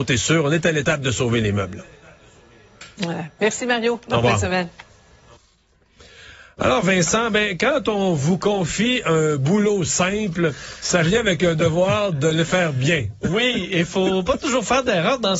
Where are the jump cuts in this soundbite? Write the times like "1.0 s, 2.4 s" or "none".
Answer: none

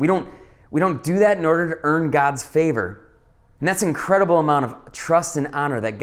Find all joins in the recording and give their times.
3.6 s

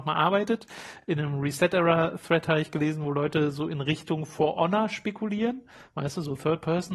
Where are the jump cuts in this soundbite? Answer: none

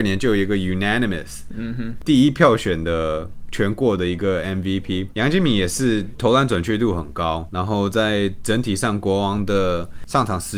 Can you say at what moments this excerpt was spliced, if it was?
none

